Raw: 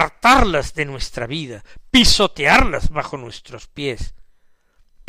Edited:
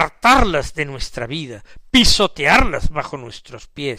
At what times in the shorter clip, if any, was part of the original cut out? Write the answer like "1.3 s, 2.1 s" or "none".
none